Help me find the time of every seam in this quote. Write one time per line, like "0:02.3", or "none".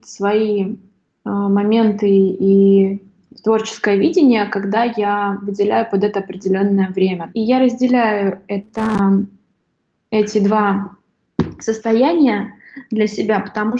0:07.3